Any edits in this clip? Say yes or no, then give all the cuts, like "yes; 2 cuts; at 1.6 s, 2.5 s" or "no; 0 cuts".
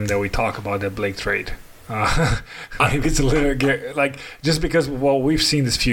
no; 0 cuts